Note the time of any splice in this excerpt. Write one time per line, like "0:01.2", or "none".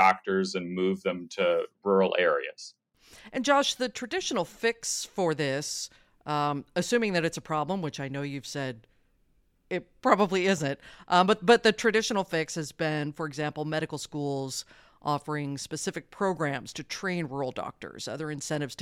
none